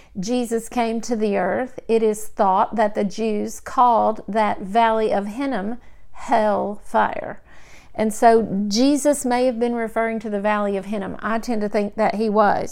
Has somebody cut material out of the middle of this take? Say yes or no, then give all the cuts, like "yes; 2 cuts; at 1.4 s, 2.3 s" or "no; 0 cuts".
no; 0 cuts